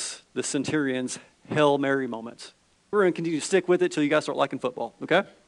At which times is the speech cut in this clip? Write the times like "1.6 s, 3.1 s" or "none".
2.9 s